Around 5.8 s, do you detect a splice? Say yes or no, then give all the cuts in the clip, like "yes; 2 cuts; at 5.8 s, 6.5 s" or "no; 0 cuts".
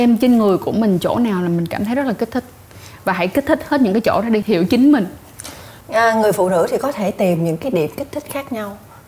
yes; 2 cuts; at 4.4 s, 5.8 s